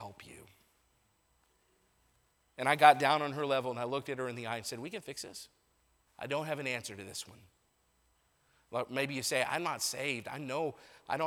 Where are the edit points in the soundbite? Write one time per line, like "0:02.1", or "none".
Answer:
0:06.1